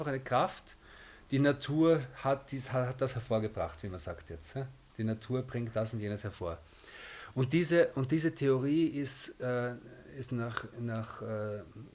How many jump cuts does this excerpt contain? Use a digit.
0